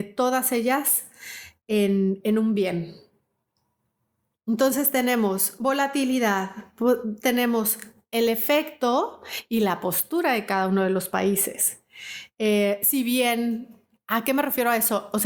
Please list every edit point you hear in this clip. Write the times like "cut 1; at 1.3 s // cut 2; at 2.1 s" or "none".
none